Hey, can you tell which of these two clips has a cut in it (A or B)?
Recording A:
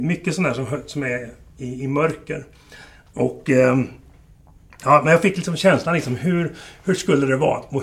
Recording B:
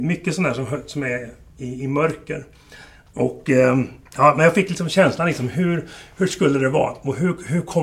B